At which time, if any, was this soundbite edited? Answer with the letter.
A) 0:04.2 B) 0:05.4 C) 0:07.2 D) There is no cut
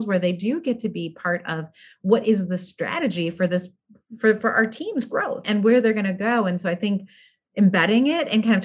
B